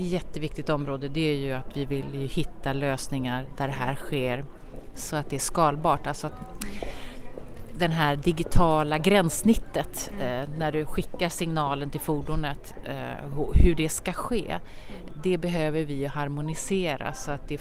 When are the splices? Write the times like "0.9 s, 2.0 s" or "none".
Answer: none

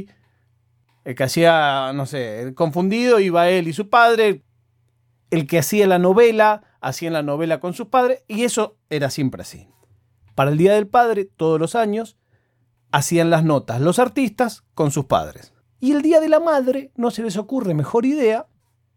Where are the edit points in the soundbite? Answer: 10.2 s, 15.6 s

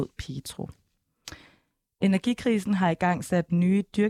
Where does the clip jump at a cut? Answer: none

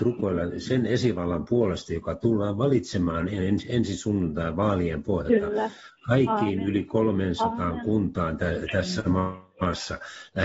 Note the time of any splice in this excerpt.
none

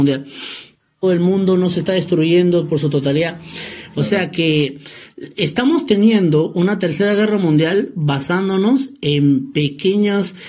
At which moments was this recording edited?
1.0 s, 3.9 s

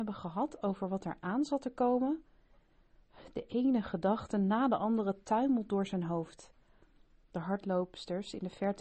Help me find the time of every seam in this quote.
7.2 s

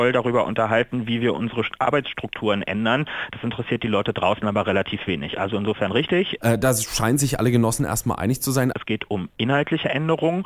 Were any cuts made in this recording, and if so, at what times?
6.4 s, 8.7 s

